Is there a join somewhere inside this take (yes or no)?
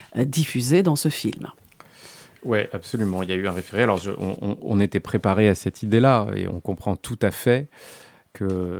yes